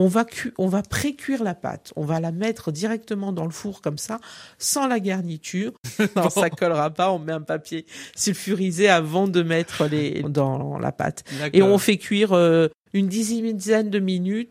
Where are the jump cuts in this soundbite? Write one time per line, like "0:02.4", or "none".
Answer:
0:05.8
0:10.2